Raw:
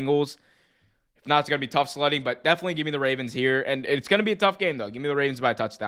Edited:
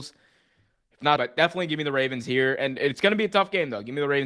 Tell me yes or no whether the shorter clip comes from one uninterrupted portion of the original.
no